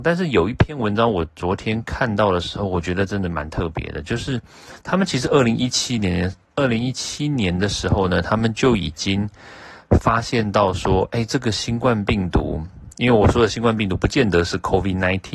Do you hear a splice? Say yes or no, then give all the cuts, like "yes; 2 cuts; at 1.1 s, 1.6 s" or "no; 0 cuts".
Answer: no; 0 cuts